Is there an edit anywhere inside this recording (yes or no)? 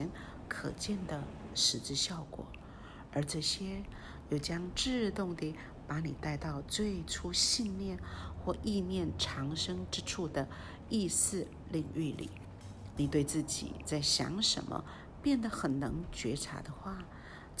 yes